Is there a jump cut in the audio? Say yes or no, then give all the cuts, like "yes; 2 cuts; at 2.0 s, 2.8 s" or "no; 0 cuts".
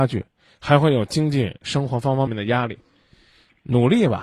yes; 1 cut; at 2.3 s